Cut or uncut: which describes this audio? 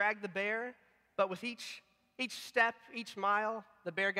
uncut